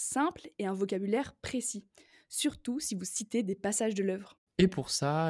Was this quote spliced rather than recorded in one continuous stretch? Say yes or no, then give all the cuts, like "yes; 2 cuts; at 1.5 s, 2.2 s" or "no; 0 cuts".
no; 0 cuts